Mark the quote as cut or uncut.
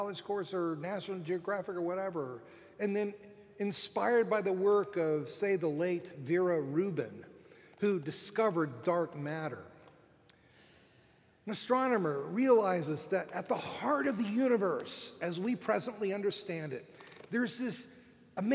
uncut